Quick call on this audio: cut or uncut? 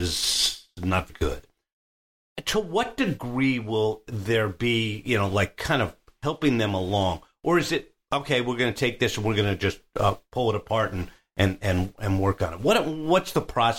cut